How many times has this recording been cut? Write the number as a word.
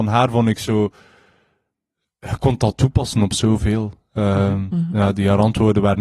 zero